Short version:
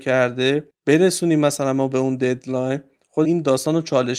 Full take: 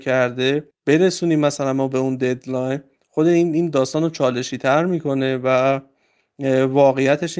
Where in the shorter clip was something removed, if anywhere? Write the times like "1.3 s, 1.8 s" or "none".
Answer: 3.2 s